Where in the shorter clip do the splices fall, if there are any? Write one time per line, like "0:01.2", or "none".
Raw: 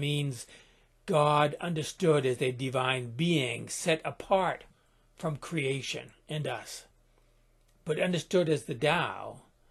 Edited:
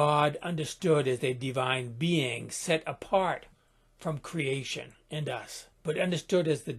0:05.8